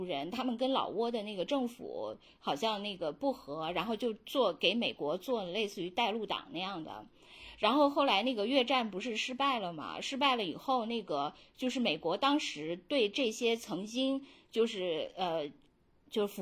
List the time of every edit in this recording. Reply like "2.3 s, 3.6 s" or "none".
none